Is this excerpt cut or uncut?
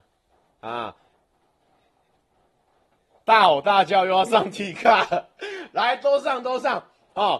uncut